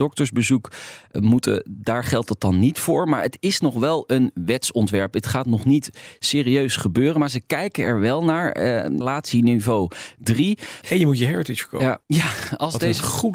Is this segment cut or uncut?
cut